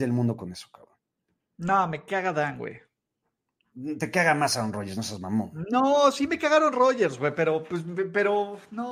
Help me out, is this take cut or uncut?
uncut